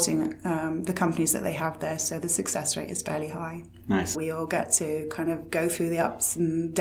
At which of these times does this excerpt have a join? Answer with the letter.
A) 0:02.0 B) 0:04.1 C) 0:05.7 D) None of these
B